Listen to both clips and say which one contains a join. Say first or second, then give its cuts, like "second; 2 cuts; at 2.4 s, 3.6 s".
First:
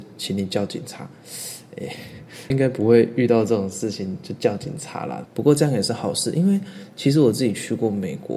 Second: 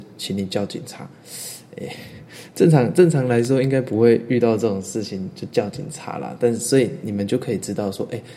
first; 2 cuts; at 2.5 s, 5.3 s